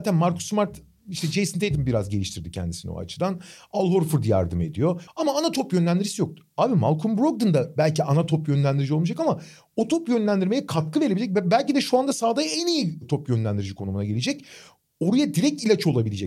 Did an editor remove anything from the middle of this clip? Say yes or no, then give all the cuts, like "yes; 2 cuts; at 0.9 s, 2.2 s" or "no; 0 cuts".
yes; 1 cut; at 5.1 s